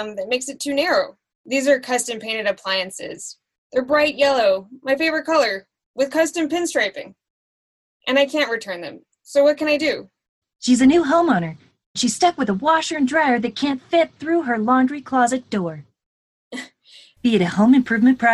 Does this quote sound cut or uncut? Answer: cut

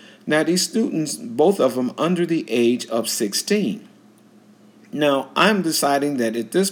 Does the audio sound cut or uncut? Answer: uncut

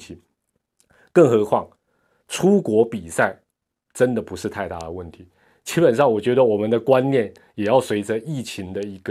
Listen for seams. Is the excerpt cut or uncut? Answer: uncut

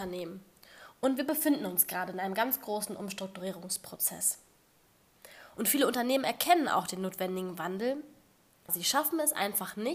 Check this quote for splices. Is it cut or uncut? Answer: cut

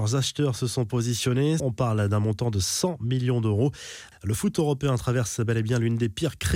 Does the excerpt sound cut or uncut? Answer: cut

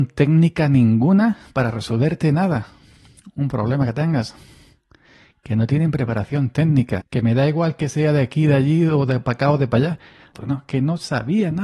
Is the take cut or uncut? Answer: cut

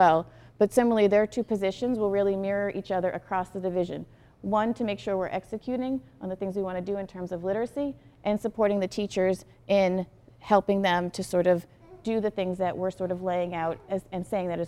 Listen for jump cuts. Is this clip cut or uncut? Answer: uncut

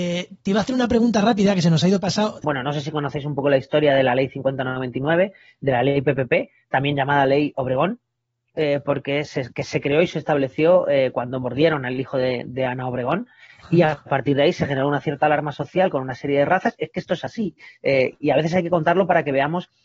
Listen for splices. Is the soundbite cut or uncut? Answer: cut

